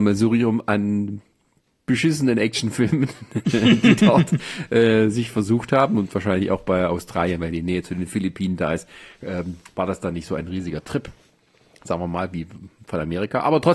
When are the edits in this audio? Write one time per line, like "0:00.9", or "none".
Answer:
none